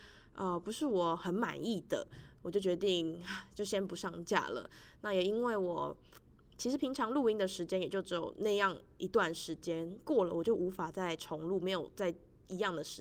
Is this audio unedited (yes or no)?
yes